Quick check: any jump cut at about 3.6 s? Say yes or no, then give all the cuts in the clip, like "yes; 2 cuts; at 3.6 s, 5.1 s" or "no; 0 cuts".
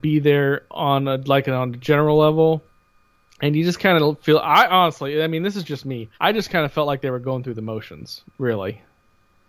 no; 1 cut; at 6.1 s